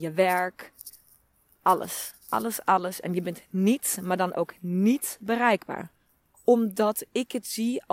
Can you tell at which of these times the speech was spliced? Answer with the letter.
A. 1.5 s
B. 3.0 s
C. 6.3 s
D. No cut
C